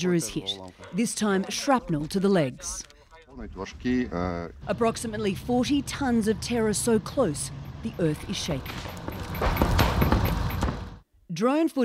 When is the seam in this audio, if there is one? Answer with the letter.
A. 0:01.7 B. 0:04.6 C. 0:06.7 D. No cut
B